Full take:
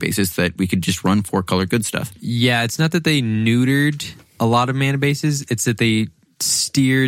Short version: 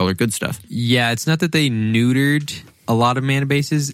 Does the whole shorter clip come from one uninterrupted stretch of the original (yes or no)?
yes